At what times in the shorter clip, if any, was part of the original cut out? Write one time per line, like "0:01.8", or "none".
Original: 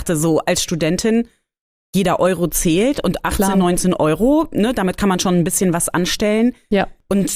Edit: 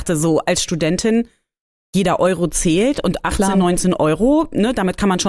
none